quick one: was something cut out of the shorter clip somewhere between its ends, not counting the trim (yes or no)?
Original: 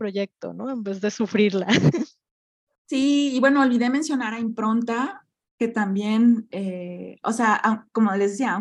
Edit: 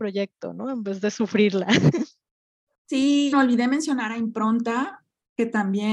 yes